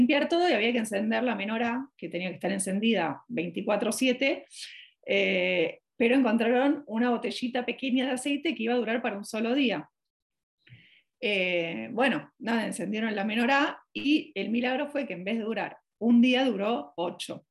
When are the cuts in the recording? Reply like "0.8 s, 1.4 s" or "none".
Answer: none